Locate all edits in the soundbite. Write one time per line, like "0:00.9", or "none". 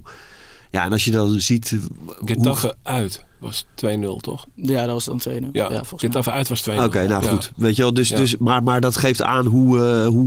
none